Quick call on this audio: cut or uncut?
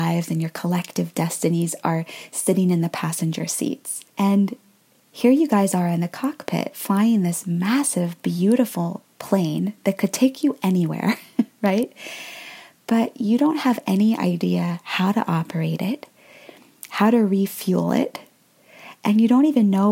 cut